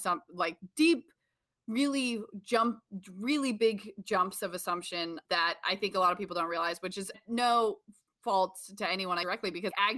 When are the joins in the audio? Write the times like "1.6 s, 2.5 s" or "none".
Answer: 7.1 s